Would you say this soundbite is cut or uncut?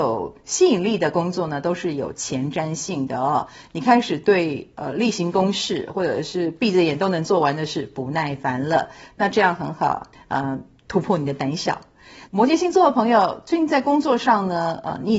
cut